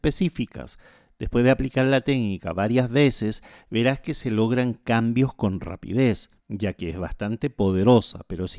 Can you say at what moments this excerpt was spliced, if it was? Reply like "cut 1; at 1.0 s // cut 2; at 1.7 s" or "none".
cut 1; at 6.4 s